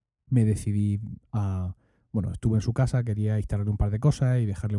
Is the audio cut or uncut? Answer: uncut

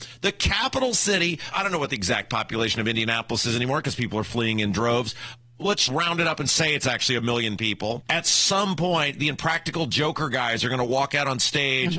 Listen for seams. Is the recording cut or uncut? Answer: cut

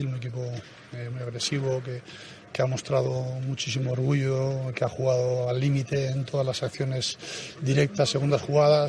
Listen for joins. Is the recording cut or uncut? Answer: uncut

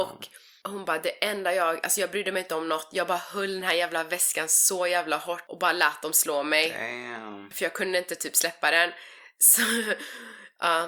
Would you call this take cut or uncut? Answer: uncut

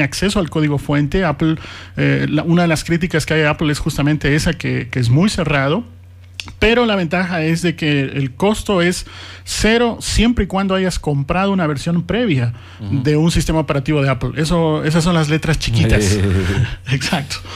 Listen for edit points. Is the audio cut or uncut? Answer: uncut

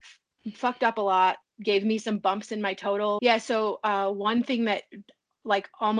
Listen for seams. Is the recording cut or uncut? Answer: cut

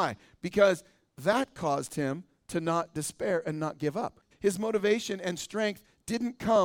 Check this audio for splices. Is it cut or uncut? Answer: cut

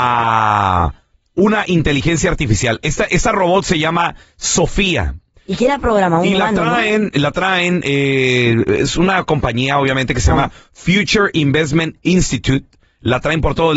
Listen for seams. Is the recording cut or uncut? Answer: uncut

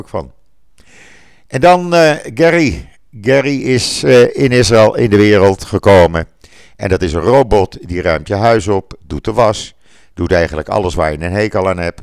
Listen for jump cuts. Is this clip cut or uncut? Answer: uncut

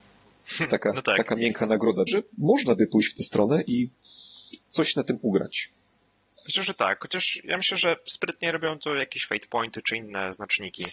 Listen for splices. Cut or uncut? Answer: cut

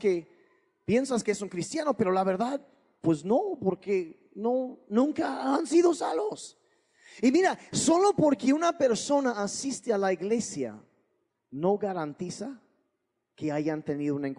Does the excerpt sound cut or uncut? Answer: uncut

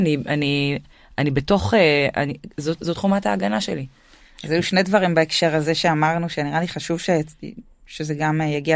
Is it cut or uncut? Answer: uncut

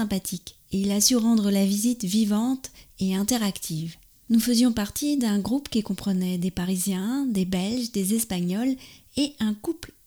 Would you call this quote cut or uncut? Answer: uncut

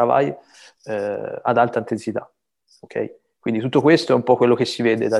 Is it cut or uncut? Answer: uncut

